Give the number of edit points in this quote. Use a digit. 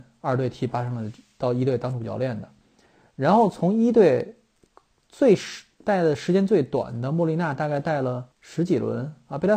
1